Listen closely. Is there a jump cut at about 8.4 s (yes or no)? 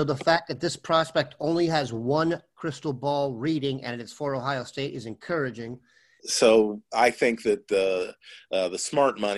no